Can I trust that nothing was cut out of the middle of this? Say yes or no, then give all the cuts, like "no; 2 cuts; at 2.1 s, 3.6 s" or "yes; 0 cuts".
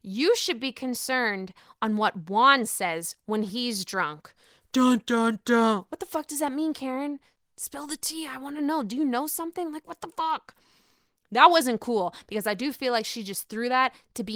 yes; 0 cuts